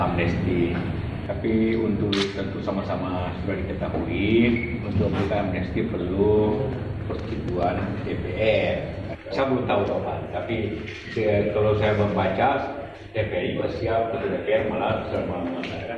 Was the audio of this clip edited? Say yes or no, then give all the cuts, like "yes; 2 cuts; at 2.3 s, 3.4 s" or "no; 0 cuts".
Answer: yes; 1 cut; at 9.3 s